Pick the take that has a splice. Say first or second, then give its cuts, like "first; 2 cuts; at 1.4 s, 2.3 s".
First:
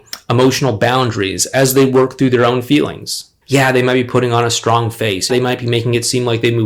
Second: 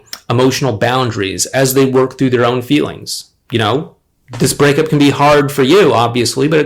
first; 2 cuts; at 3.4 s, 5.3 s